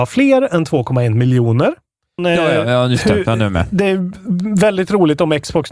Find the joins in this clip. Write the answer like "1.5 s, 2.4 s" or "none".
2.2 s